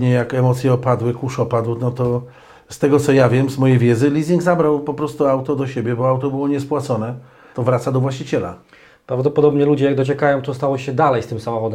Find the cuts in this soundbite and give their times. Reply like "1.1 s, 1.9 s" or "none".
7.5 s

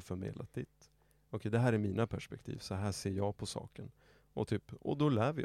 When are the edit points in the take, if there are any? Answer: none

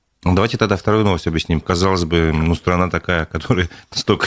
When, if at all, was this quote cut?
1.6 s

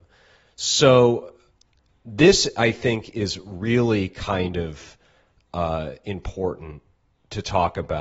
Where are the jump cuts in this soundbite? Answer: none

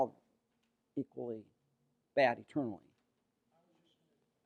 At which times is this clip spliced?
none

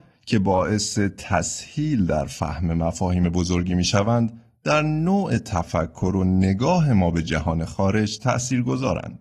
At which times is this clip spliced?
none

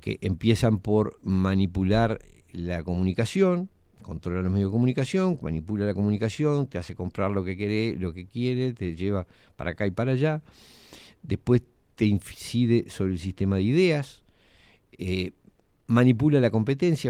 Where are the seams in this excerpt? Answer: none

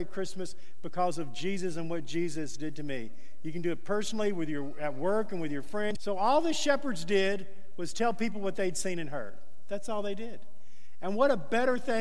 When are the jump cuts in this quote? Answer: 6.0 s

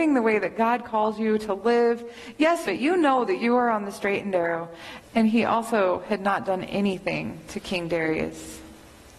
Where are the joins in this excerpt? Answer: 2.7 s, 5.0 s

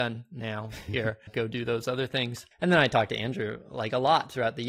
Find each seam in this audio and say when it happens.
1.3 s, 2.5 s

